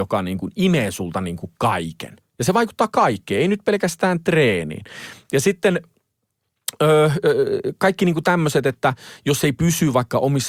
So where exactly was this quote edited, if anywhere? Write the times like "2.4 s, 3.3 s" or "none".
2.2 s